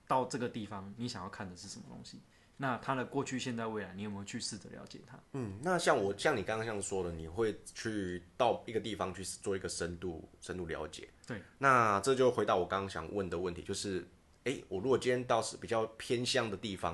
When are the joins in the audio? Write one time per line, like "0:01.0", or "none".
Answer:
0:05.3